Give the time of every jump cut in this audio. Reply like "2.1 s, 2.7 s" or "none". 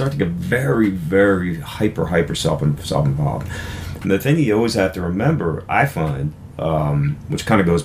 none